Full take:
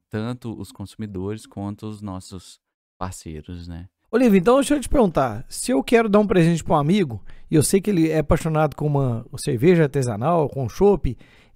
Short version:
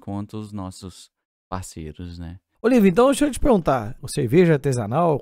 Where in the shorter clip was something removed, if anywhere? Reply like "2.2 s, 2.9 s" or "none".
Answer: 4.0 s